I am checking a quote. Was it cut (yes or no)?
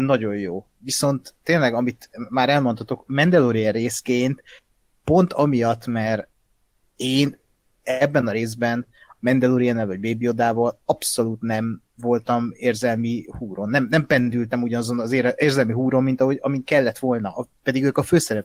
no